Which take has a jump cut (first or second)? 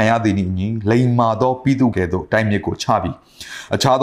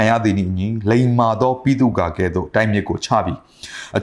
first